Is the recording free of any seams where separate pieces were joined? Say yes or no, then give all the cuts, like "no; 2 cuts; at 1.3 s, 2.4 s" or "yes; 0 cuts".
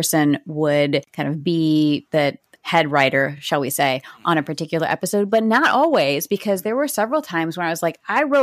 yes; 0 cuts